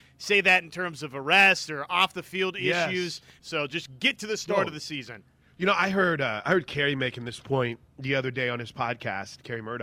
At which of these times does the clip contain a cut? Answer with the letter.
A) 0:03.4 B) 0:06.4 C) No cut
A